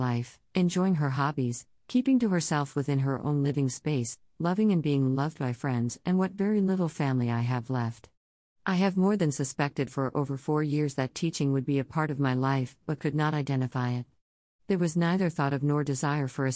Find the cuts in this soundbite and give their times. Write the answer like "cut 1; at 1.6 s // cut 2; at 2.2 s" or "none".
cut 1; at 14.6 s